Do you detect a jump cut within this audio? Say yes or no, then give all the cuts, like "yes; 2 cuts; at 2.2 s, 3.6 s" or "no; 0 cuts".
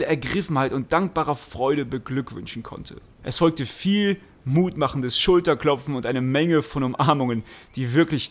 no; 0 cuts